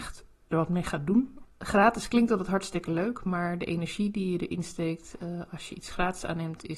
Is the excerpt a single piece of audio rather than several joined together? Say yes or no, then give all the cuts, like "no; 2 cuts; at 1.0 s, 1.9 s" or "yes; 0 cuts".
no; 1 cut; at 1.4 s